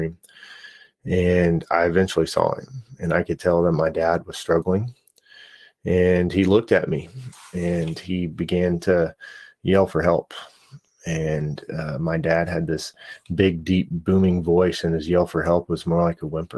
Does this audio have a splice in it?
no; 0 cuts

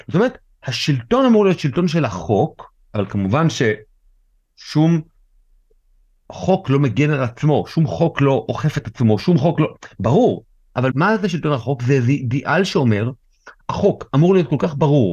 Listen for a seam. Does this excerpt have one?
yes; 1 cut; at 10.9 s

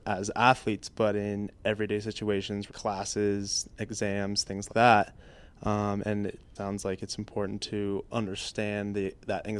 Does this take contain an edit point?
yes; 3 cuts; at 2.7 s, 4.7 s, 6.6 s

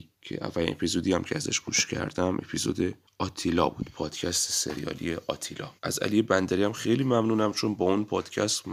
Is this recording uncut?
no; 1 cut; at 5.8 s

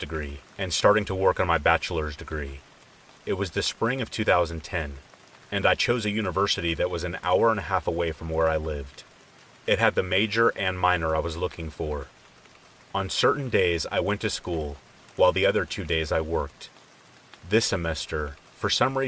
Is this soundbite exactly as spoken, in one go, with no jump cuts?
yes; 0 cuts

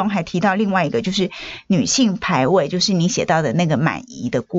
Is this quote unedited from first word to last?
yes; 0 cuts

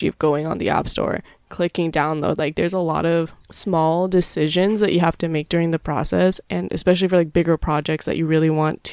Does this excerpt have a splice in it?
yes; 2 cuts; at 3.4 s, 6.4 s

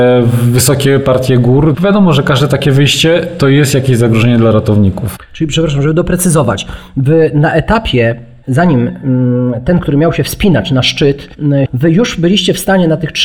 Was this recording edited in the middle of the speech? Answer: yes; 2 cuts; at 1.7 s, 11.7 s

